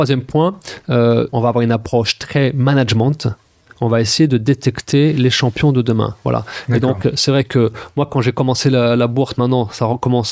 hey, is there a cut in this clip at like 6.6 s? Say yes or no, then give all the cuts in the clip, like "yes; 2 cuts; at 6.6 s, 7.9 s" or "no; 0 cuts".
no; 1 cut; at 1.3 s